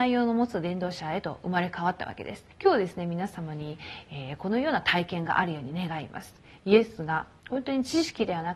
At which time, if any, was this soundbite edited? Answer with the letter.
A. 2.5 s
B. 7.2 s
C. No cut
A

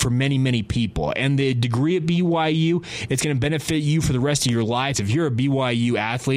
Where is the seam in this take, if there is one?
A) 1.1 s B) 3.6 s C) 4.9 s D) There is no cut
C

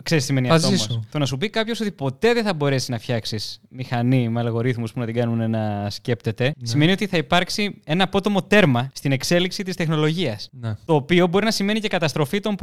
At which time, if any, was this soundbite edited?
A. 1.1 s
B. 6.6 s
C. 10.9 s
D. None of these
D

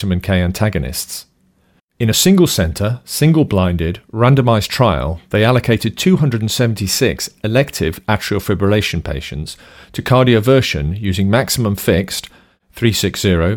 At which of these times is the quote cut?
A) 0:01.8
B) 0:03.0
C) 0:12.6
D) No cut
A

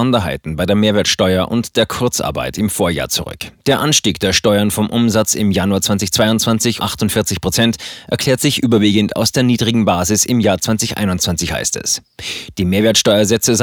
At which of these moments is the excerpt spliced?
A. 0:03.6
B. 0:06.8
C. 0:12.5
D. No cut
B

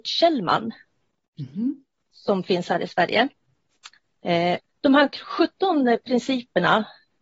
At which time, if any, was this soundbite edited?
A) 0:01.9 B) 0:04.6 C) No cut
B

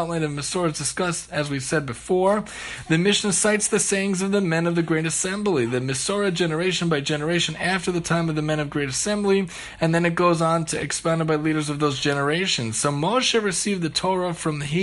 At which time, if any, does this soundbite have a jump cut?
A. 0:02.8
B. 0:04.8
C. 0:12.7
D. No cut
D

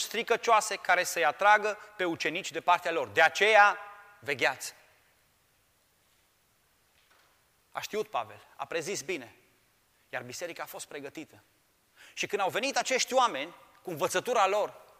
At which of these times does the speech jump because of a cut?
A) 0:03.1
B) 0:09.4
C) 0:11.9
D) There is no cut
D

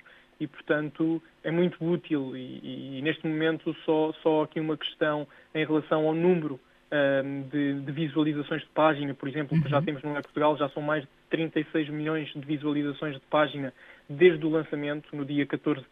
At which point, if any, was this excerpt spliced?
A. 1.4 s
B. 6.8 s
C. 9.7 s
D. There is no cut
A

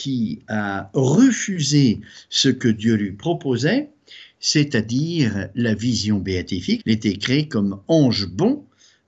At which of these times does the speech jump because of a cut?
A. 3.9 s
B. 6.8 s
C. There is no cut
B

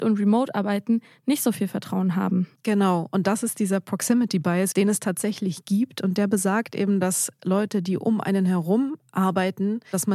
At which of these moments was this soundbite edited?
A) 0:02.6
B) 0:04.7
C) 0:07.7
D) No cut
B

